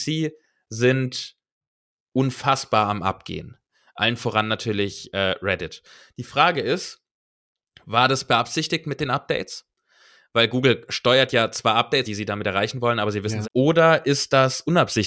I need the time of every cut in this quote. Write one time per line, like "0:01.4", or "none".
0:12.0
0:13.4